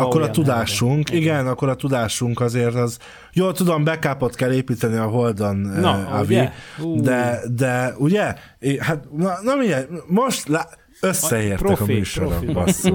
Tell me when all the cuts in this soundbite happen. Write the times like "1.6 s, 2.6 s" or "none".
none